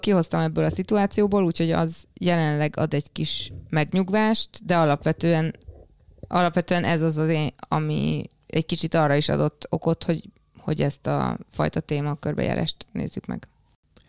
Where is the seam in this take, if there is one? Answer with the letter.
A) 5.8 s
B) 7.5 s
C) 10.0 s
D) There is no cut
B